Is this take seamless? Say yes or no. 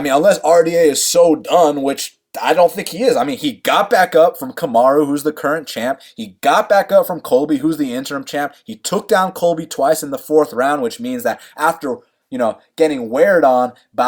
yes